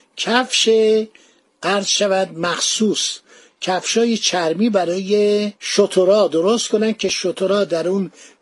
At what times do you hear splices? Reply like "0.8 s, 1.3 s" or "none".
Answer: 5.6 s